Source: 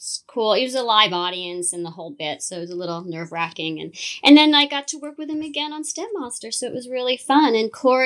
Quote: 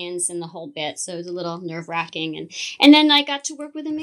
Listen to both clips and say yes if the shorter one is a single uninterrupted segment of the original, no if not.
yes